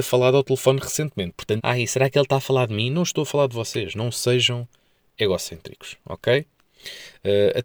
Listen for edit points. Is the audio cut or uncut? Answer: cut